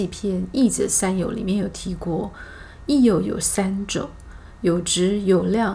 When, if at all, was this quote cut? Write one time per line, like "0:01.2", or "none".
none